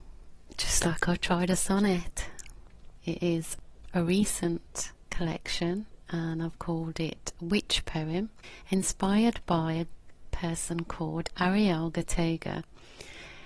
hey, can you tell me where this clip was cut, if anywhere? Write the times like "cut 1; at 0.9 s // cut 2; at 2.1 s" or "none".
cut 1; at 3.0 s